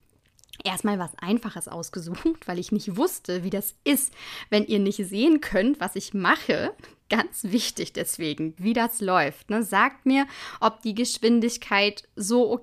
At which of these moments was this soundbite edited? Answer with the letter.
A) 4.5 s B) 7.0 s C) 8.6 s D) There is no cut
C